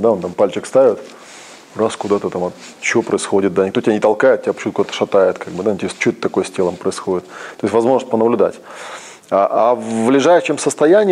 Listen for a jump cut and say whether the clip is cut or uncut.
uncut